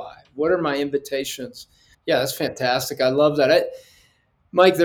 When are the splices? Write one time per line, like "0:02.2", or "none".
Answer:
0:01.9